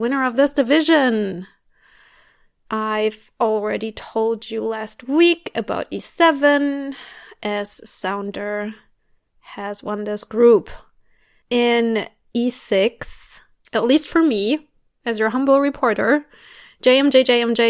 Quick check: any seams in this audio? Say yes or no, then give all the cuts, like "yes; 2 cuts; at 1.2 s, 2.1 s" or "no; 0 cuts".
yes; 2 cuts; at 11.4 s, 13.6 s